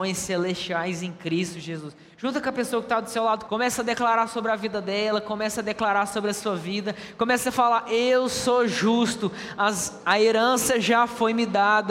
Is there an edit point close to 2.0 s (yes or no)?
no